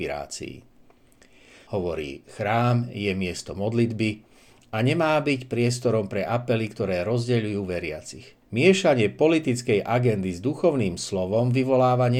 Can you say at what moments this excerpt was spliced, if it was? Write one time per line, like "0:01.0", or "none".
0:01.7
0:08.4